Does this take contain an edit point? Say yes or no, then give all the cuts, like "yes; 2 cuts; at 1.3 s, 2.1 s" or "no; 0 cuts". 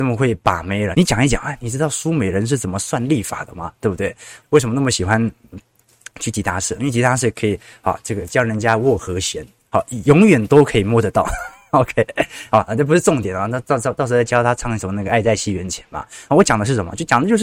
yes; 2 cuts; at 0.9 s, 4.4 s